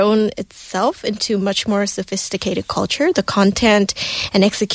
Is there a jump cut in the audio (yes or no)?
no